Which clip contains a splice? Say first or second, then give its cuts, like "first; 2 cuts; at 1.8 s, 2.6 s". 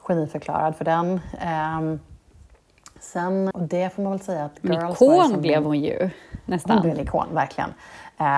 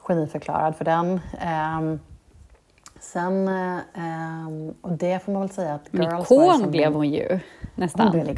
first; 1 cut; at 3.5 s